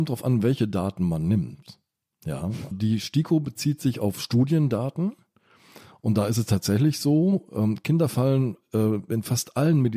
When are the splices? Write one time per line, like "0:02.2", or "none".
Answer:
0:02.7